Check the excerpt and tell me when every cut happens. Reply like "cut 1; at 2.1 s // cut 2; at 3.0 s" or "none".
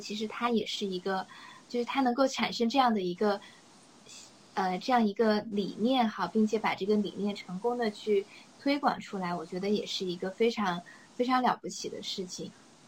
cut 1; at 1.7 s